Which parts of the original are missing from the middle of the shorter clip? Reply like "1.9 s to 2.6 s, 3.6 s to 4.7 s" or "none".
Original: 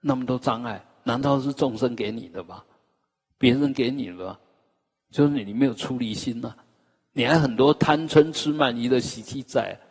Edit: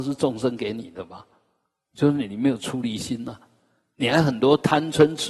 3.2 s to 5.0 s